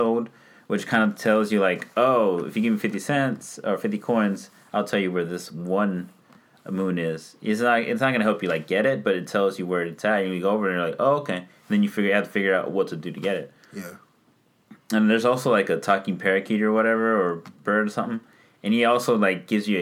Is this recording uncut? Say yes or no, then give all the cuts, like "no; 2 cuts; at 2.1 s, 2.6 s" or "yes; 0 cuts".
yes; 0 cuts